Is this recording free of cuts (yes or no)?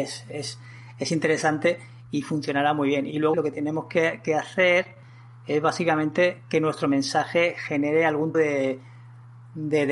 no